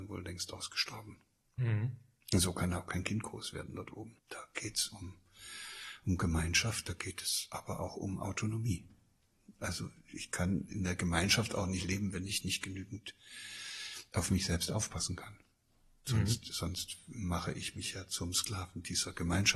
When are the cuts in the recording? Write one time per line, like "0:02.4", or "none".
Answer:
0:04.2